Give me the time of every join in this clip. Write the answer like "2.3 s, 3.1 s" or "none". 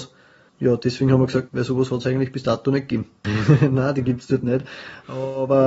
1.5 s, 3.2 s